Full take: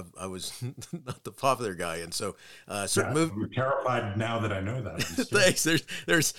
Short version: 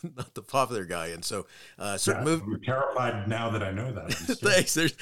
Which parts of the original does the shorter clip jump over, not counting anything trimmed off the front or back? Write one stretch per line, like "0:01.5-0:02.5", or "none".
none

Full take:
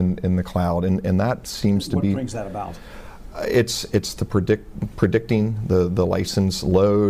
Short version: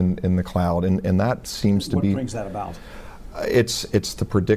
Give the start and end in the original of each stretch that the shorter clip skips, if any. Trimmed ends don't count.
none

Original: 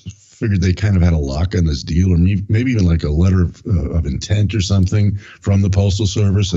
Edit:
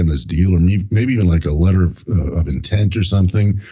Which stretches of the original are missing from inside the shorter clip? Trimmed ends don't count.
none

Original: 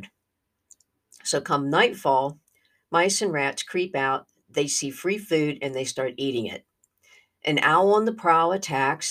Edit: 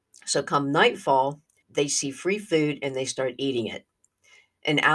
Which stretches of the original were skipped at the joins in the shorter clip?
0:02.6-0:04.4

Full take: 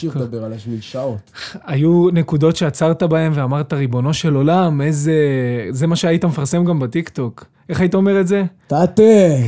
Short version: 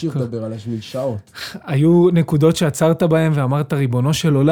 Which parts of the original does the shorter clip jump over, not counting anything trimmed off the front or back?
none

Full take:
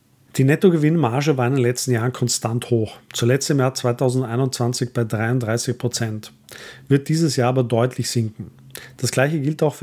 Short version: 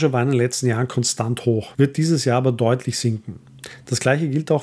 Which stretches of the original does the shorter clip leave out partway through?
0:03.0-0:06.9

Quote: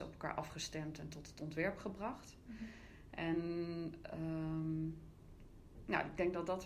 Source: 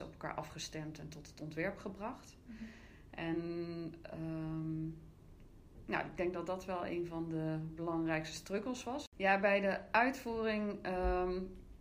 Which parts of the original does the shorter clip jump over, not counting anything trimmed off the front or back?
none

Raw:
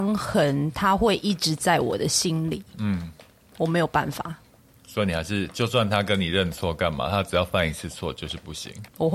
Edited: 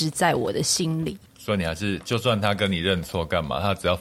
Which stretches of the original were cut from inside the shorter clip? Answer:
0:02.7-0:04.7

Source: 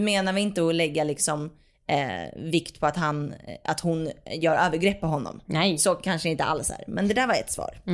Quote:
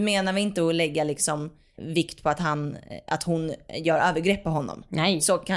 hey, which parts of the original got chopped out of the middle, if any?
0:01.8-0:02.3

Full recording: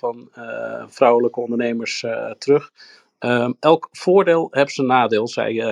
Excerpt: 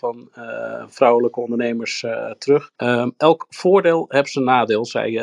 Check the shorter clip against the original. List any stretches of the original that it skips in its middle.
0:02.7-0:03.2

